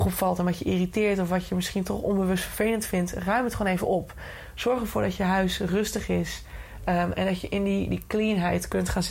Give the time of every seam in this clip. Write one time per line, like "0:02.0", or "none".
none